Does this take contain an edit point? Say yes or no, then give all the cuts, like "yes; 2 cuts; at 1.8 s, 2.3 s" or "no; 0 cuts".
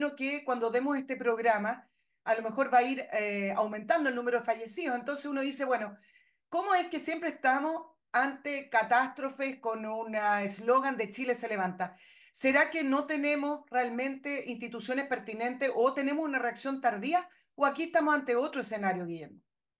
no; 0 cuts